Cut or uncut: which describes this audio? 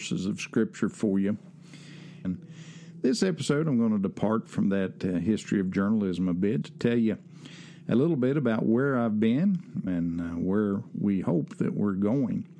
cut